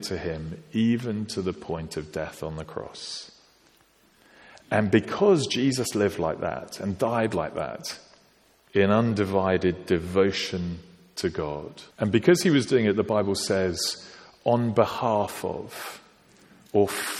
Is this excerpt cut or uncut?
cut